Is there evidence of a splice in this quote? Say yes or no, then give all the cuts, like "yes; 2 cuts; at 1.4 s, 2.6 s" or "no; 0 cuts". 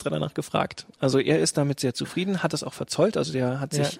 no; 0 cuts